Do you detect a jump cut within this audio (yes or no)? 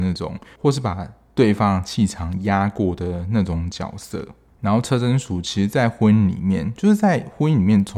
no